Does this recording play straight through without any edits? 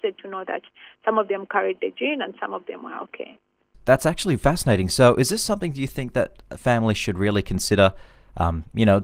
yes; 0 cuts

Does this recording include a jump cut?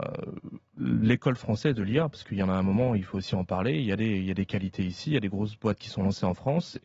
no; 0 cuts

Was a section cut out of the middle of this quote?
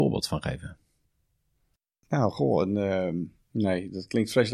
yes; 1 cut; at 3.4 s

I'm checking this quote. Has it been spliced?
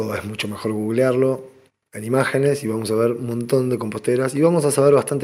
no; 0 cuts

